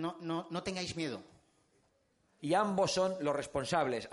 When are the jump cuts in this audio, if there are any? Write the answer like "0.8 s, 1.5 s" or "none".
2.4 s